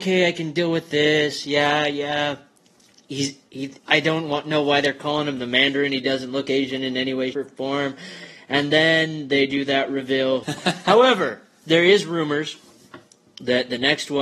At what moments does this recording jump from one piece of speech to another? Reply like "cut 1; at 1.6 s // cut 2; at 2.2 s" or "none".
cut 1; at 7.3 s // cut 2; at 10.4 s